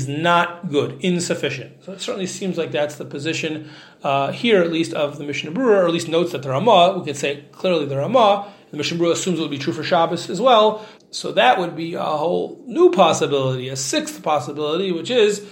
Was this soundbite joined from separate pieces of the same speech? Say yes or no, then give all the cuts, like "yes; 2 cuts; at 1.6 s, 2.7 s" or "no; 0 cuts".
yes; 1 cut; at 11.0 s